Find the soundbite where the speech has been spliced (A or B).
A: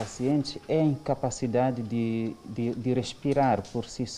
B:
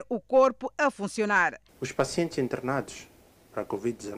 B